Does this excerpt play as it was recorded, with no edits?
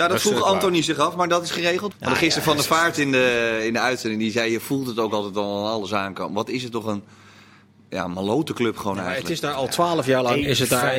no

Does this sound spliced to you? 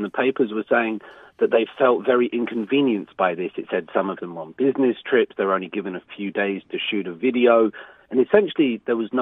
no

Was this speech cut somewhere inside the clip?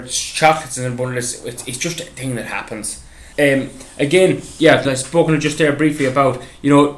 yes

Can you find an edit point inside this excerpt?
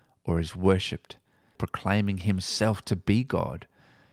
yes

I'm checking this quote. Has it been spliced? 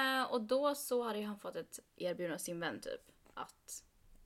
no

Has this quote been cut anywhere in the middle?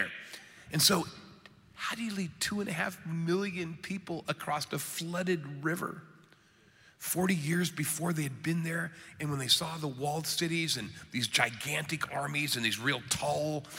no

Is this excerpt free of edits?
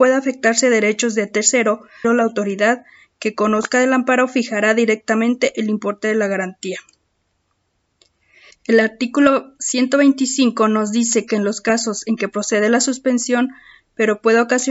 no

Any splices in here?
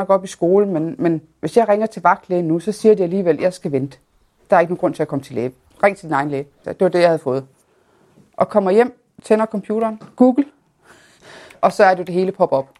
yes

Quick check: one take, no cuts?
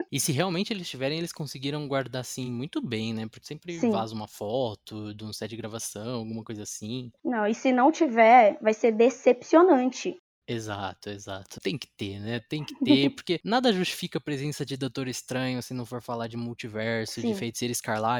yes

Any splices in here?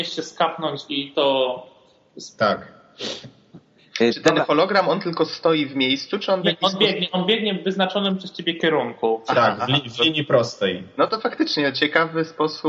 no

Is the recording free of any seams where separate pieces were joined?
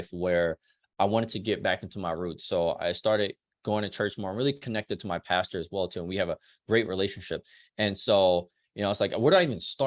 yes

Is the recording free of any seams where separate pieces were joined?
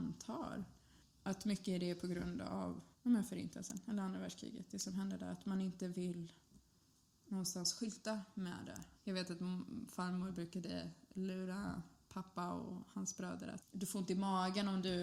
no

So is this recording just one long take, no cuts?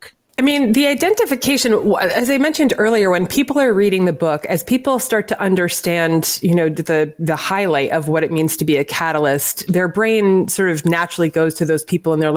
yes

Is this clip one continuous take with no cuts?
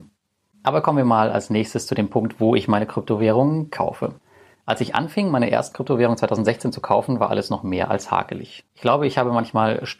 yes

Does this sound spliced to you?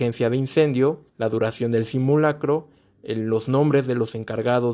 yes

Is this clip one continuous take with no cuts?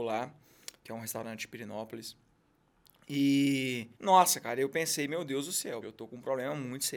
no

